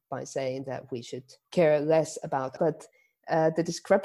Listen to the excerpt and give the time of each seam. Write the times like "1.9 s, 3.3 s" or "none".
2.6 s